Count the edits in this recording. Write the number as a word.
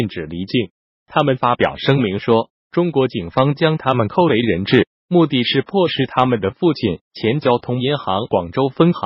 one